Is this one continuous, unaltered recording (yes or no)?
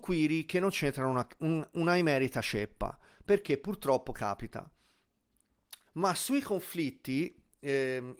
no